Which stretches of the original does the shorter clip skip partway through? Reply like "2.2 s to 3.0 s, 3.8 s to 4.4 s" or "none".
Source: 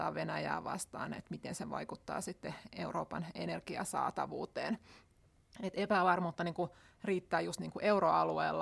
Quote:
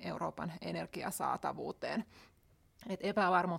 none

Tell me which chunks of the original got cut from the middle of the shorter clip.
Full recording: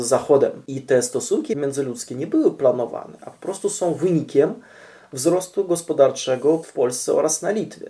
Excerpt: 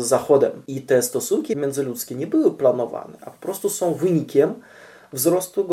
none

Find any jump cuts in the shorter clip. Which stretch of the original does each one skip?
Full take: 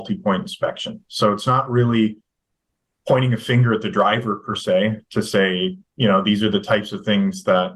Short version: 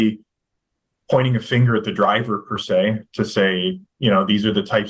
none

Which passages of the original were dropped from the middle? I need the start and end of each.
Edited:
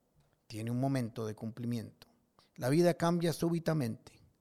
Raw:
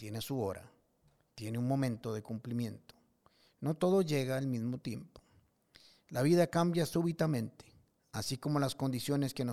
3.3 s to 5.9 s

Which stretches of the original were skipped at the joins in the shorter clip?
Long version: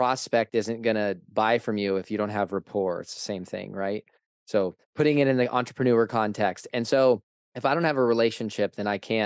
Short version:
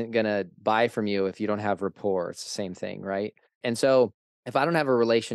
4.3 s to 6.7 s

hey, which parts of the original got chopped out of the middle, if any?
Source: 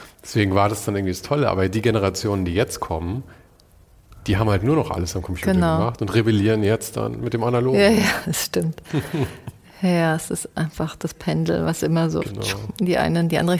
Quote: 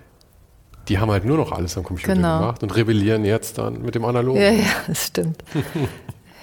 none

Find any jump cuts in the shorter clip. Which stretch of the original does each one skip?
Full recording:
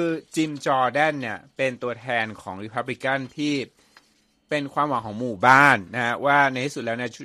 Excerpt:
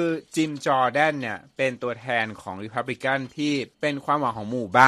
3.7 s to 4.4 s

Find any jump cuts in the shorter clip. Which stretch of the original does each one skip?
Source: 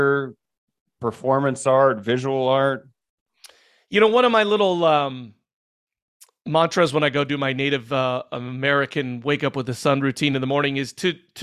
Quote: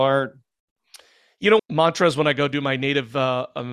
4.1 s to 6.4 s

